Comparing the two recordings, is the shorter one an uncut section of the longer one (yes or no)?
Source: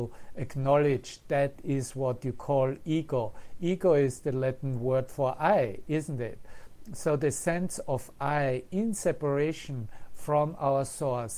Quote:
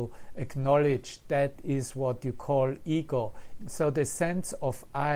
no